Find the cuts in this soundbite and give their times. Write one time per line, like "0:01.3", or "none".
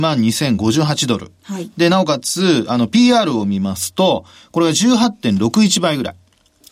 none